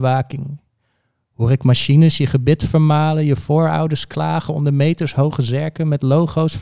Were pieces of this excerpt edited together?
no; 0 cuts

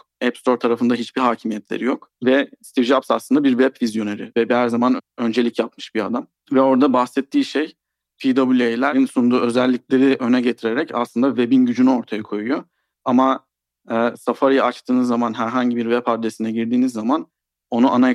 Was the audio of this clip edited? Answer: yes; 2 cuts; at 6.3 s, 12.9 s

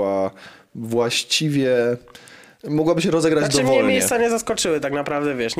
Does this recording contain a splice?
no; 0 cuts

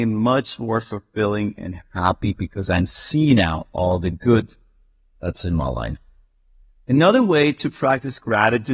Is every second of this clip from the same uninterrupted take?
yes; 0 cuts

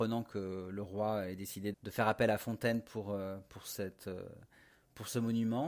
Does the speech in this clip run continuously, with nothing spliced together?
no; 1 cut; at 1.7 s

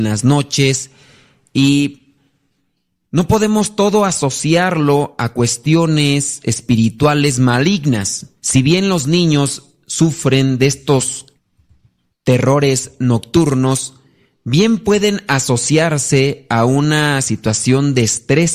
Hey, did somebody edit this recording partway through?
yes; 2 cuts; at 8.4 s, 12.1 s

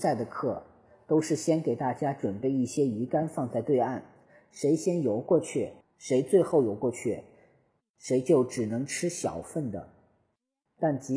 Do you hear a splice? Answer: yes; 1 cut; at 5.8 s

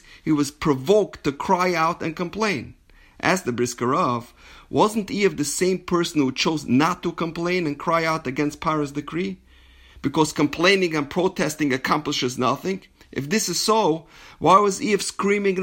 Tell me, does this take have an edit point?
no; 0 cuts

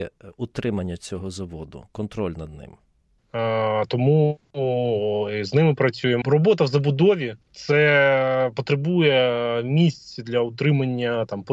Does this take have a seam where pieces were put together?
yes; 3 cuts; at 3.2 s, 6.2 s, 7.4 s

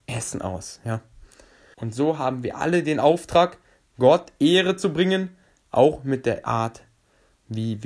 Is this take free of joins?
no; 1 cut; at 1.7 s

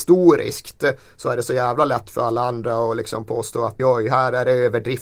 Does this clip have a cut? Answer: yes; 1 cut; at 3.8 s

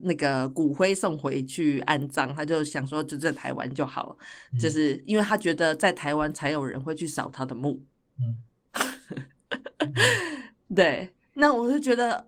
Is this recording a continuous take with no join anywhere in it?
yes; 0 cuts

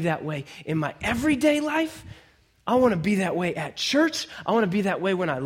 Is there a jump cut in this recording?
no; 0 cuts

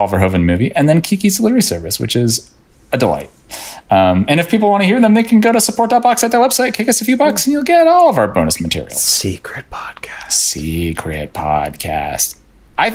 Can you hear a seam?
no; 0 cuts

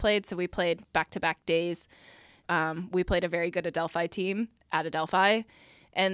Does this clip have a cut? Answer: yes; 1 cut; at 2.4 s

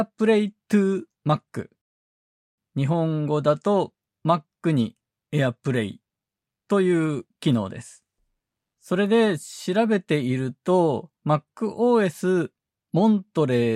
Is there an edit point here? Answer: yes; 2 cuts; at 8.7 s, 11.2 s

